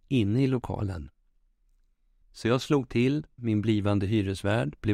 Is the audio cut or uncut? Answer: cut